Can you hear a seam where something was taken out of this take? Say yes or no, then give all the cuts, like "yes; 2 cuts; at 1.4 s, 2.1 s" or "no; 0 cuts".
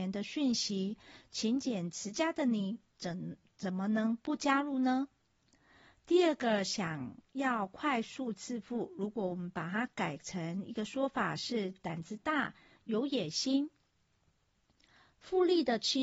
no; 0 cuts